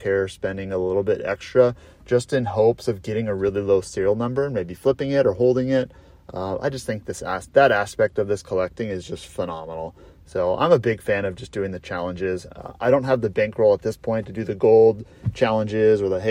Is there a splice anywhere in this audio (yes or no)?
no